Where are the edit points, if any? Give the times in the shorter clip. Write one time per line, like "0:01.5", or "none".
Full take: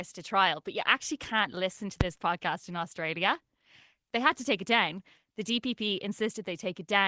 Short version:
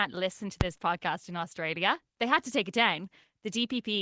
0:02.1